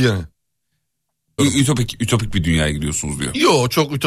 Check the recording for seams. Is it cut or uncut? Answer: cut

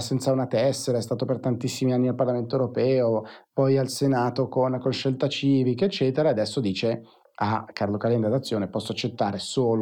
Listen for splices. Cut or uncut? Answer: uncut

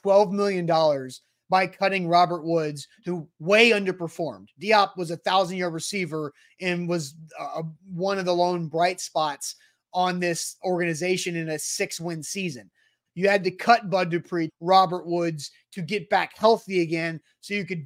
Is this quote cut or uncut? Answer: cut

